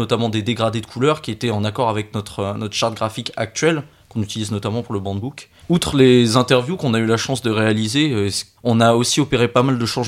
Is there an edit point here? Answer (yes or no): yes